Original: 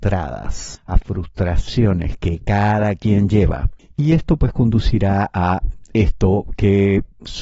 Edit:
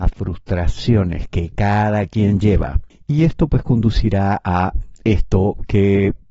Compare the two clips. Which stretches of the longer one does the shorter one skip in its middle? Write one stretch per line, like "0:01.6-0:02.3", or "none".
none